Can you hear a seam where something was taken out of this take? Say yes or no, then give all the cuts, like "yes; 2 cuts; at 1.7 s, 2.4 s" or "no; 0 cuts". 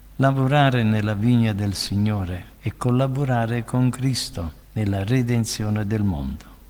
yes; 2 cuts; at 2.6 s, 4.6 s